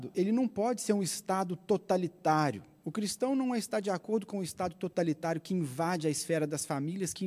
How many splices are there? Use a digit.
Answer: 0